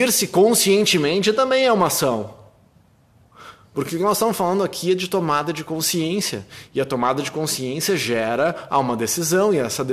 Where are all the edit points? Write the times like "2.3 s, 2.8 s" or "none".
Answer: none